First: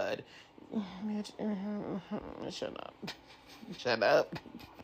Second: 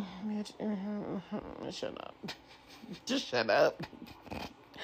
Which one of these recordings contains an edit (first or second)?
first